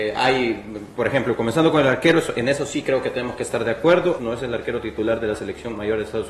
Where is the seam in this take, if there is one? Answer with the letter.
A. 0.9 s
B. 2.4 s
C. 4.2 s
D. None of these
C